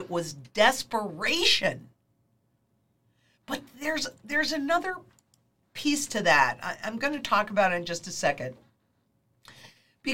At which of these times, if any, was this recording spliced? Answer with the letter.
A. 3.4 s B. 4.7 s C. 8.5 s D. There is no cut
D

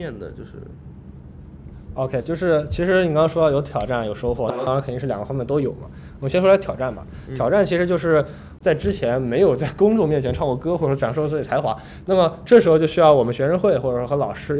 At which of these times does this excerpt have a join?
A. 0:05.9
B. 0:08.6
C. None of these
B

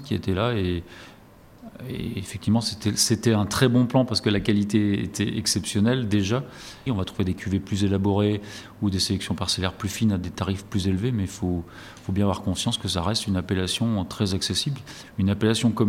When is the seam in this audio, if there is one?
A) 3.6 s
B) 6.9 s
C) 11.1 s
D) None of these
B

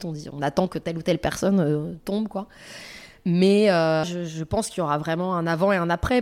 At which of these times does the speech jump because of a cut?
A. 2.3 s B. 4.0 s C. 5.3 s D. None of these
B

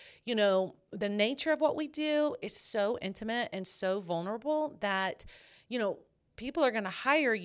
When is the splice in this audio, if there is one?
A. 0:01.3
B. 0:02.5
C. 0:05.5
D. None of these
D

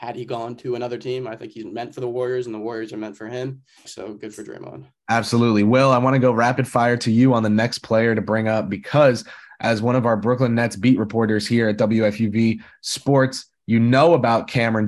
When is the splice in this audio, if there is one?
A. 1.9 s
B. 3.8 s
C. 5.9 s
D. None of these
B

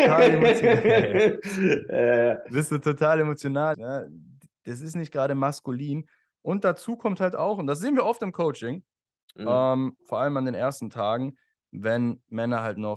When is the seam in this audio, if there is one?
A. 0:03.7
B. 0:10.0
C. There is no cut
A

